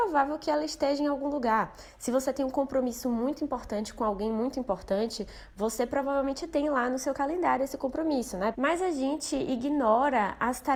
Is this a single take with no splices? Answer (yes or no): no